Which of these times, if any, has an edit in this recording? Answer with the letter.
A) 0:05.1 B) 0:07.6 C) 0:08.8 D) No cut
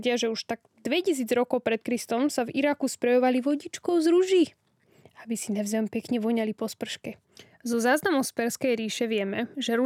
D